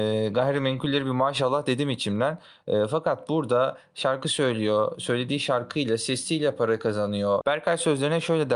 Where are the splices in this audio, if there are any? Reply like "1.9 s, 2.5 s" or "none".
7.4 s